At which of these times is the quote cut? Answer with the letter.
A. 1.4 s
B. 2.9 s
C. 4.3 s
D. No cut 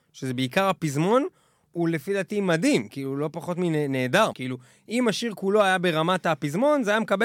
C